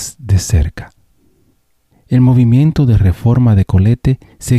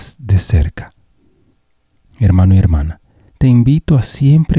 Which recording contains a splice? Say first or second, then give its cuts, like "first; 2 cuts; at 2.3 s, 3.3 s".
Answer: first; 1 cut; at 1.9 s